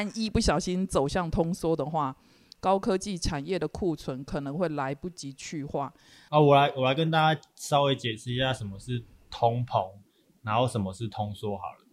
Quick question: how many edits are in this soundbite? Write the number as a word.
one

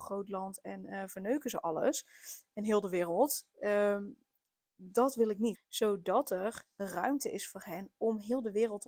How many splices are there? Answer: one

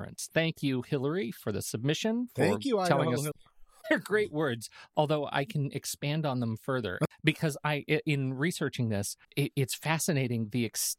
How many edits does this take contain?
two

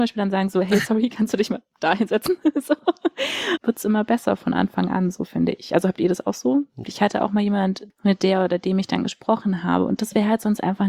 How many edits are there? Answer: three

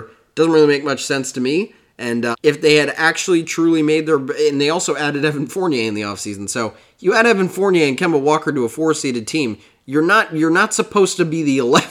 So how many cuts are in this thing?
one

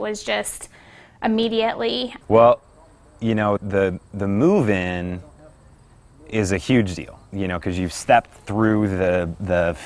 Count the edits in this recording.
two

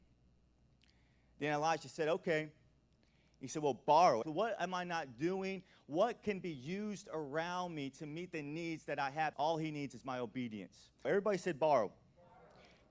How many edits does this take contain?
three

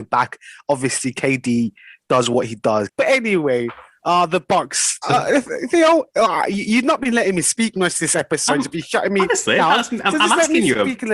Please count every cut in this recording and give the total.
two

